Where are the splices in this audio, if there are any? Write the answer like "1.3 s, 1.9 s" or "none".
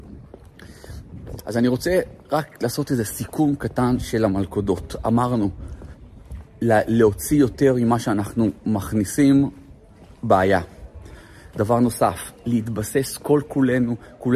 1.4 s